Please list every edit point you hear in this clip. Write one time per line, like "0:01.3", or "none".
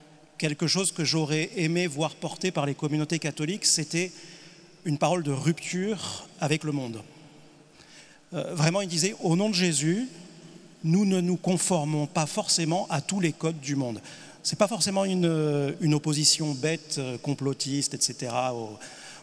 none

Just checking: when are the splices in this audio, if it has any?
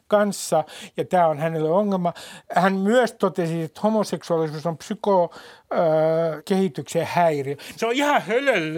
0:06.4
0:07.8

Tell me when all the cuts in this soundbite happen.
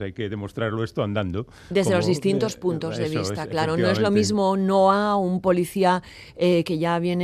none

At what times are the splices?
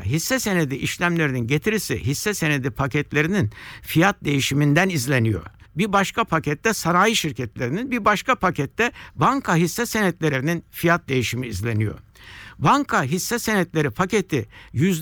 0:05.6

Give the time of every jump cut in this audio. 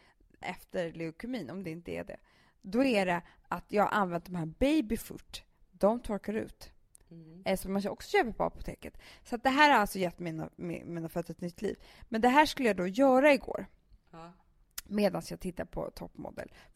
none

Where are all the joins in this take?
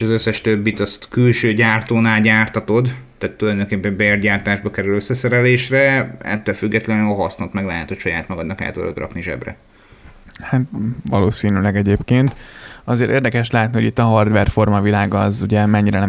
none

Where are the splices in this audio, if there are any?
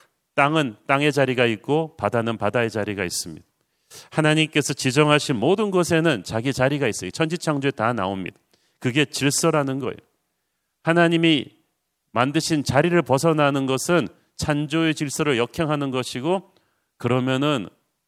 none

